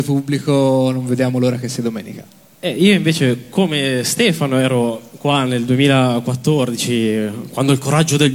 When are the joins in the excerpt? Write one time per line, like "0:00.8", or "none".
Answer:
none